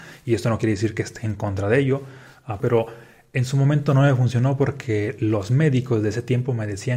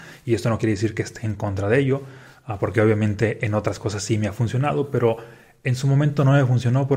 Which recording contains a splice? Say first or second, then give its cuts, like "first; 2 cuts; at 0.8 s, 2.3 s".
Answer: first; 1 cut; at 2.6 s